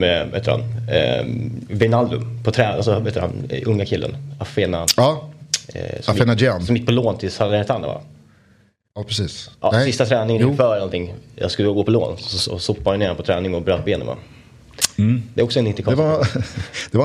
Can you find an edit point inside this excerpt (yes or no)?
no